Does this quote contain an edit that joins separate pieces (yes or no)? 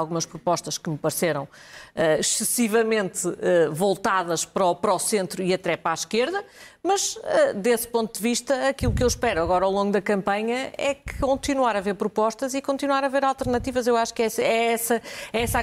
no